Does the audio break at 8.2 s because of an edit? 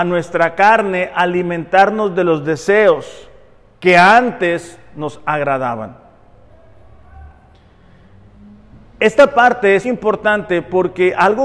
no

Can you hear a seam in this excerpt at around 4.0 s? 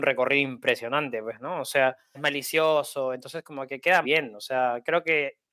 yes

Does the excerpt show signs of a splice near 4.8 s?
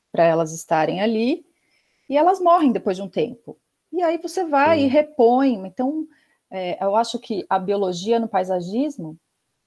no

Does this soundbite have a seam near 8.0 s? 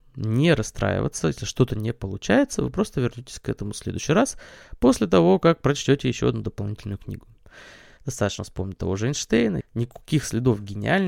yes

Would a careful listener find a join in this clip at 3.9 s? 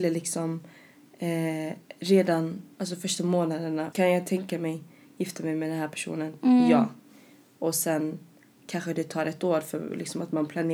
yes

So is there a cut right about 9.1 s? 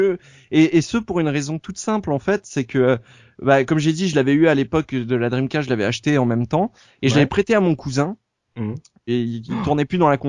yes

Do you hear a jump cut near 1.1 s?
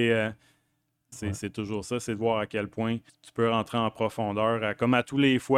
yes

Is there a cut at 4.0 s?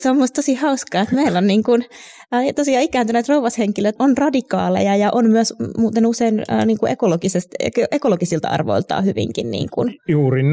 yes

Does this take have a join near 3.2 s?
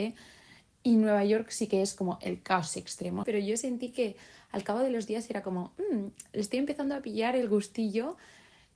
yes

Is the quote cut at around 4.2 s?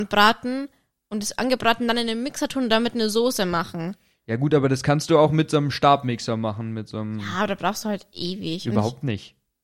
no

